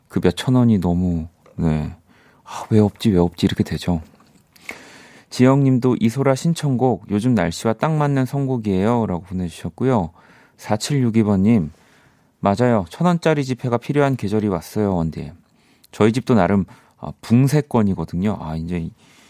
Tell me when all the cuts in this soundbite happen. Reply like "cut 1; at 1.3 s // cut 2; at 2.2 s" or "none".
none